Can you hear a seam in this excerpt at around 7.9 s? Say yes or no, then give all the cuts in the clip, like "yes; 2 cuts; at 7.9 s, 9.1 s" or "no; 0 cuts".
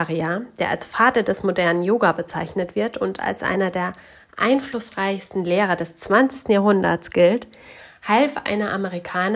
no; 0 cuts